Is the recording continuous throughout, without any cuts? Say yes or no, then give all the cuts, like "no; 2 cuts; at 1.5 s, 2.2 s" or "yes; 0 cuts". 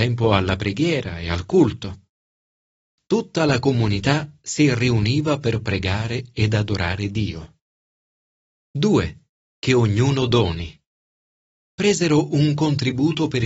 yes; 0 cuts